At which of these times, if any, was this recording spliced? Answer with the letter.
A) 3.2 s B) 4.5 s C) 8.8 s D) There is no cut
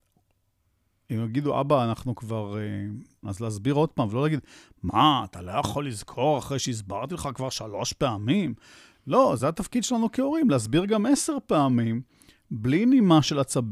A